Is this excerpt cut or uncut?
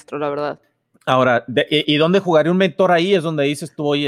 uncut